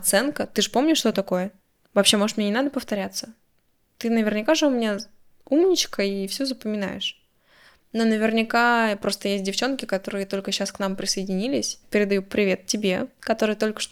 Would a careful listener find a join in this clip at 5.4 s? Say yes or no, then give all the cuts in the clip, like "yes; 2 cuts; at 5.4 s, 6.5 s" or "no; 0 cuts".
no; 1 cut; at 11.8 s